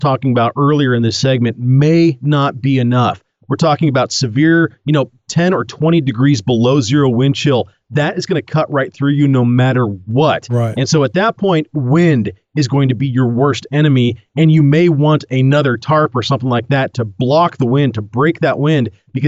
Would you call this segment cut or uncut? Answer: uncut